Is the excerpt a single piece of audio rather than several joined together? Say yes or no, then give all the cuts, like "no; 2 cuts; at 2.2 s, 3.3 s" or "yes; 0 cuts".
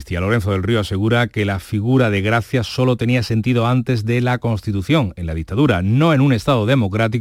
yes; 0 cuts